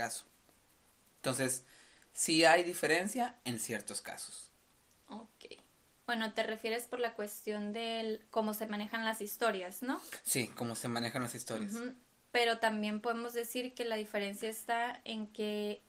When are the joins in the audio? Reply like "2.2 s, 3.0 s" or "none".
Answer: none